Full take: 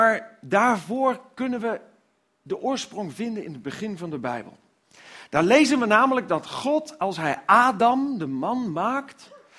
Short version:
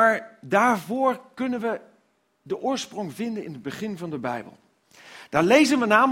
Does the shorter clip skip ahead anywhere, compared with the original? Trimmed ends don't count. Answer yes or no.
no